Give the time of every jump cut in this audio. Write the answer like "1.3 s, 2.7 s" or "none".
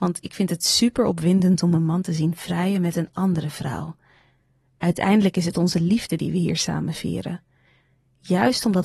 none